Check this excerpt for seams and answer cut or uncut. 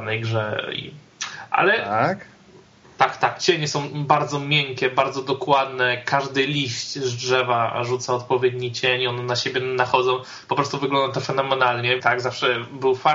cut